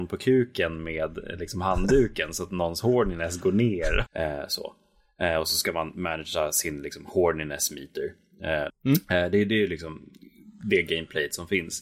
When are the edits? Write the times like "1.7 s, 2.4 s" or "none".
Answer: 4.1 s, 8.7 s